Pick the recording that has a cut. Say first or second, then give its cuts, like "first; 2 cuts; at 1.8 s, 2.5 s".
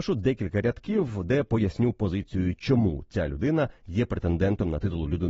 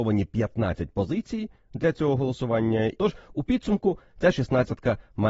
second; 1 cut; at 3.0 s